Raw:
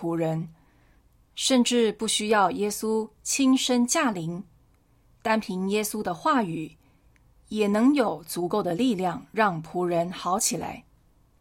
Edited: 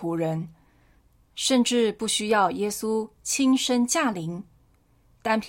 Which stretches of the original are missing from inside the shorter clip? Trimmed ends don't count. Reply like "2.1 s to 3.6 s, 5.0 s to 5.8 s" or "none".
none